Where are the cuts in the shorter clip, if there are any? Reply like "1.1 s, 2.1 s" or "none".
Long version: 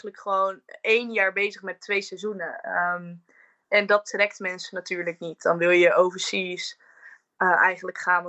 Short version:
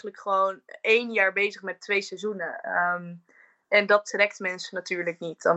none

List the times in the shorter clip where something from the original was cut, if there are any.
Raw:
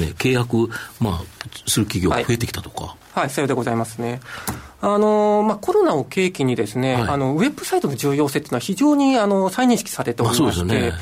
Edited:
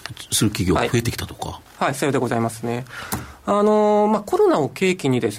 none

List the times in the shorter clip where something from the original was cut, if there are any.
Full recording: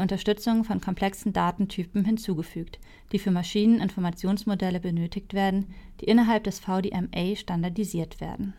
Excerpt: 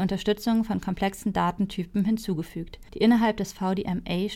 2.9 s

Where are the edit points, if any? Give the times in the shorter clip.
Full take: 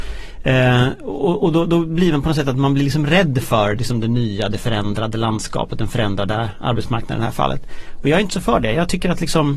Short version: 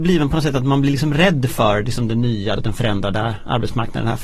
2.6 s

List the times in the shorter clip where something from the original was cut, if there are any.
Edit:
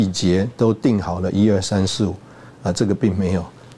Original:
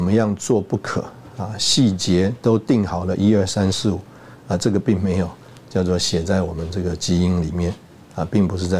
none

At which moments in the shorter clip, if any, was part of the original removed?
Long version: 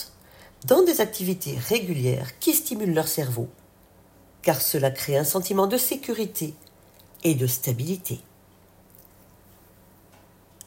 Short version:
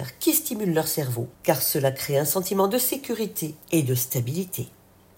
1.3 s, 3.6 s

